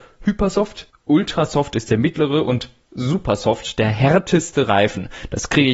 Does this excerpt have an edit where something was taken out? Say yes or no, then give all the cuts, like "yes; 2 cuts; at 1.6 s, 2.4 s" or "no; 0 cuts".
yes; 1 cut; at 0.9 s